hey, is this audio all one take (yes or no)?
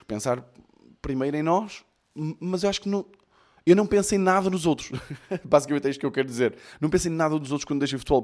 yes